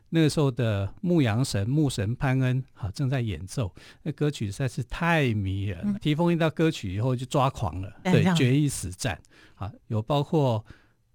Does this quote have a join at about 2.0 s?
no; 3 cuts; at 5.9 s, 8.0 s, 9.8 s

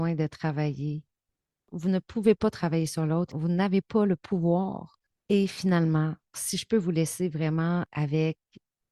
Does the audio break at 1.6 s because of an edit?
no; 2 cuts; at 5.1 s, 6.3 s

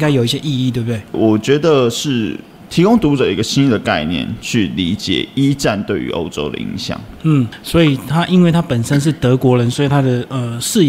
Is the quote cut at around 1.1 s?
yes; 1 cut; at 1.1 s

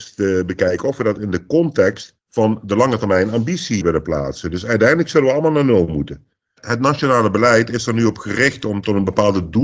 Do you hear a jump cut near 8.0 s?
no; 3 cuts; at 2.2 s, 3.8 s, 6.6 s

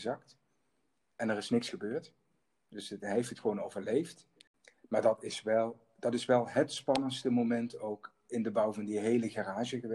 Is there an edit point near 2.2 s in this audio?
no; 0 cuts

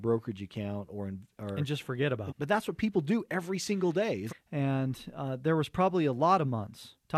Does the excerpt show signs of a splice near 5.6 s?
no; 2 cuts; at 2.3 s, 4.3 s

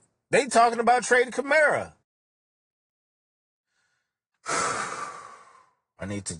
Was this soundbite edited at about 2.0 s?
yes; 1 cut; at 2.0 s

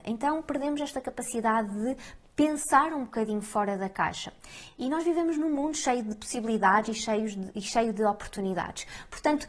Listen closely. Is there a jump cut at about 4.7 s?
no; 0 cuts

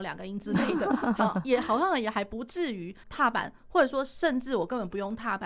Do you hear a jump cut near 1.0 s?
no; 1 cut; at 3.0 s

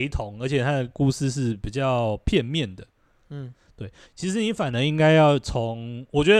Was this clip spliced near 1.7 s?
no; 1 cut; at 4.0 s

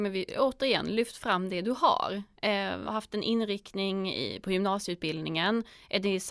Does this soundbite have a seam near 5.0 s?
no; 1 cut; at 2.9 s

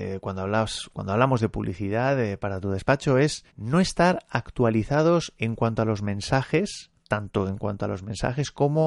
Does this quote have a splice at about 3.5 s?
yes; 1 cut; at 3.5 s

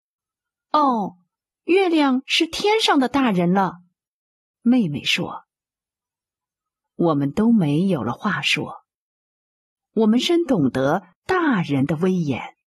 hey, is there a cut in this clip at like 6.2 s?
no; 1 cut; at 10.2 s

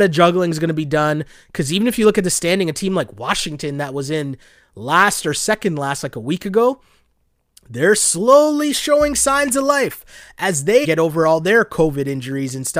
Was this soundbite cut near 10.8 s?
yes; 1 cut; at 10.8 s

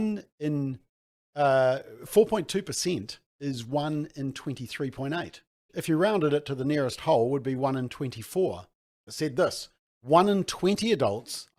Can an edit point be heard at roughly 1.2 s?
no; 2 cuts; at 5.7 s, 9.1 s

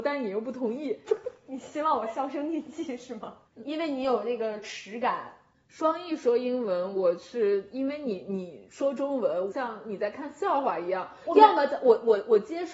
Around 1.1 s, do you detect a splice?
yes; 3 cuts; at 1.1 s, 3.4 s, 9.5 s

